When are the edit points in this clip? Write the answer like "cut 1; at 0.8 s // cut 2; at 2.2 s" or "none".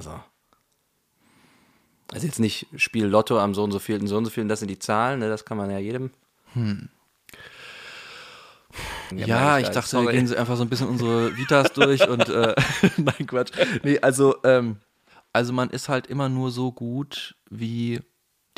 cut 1; at 9.1 s